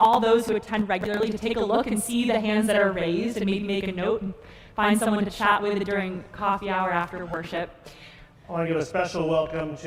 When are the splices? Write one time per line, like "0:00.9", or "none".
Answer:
0:08.4